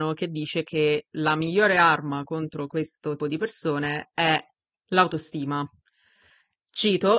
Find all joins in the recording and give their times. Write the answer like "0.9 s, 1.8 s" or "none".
3.2 s